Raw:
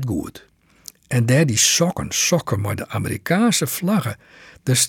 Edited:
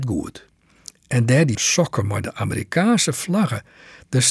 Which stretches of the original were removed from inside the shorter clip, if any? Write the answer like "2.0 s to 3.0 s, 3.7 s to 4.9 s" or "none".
1.5 s to 2.1 s